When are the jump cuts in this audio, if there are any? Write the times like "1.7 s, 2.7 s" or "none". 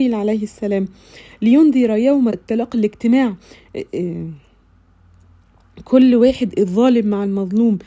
2.3 s